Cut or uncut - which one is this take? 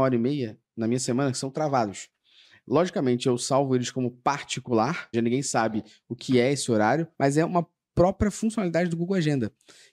cut